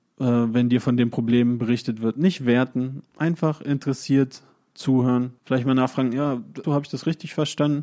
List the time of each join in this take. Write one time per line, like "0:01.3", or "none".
0:05.4
0:06.6